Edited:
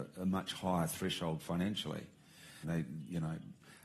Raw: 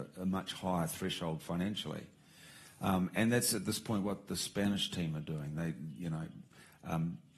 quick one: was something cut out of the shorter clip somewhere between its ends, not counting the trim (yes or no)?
yes